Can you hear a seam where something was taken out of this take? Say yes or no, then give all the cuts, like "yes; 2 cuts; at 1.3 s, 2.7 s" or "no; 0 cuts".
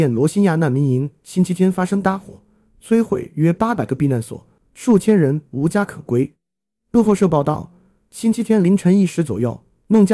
no; 0 cuts